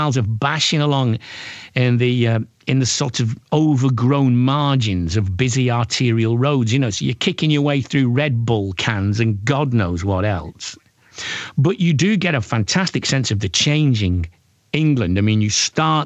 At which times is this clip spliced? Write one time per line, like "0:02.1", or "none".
none